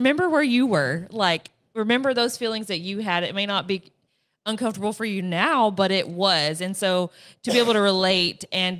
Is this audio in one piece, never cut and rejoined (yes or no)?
yes